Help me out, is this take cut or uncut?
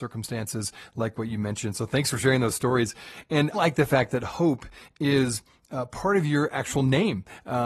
cut